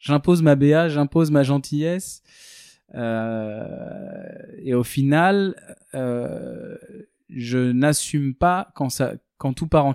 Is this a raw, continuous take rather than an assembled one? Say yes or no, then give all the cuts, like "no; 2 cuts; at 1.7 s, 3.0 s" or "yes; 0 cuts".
yes; 0 cuts